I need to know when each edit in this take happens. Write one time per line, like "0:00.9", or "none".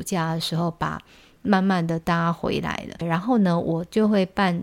0:01.4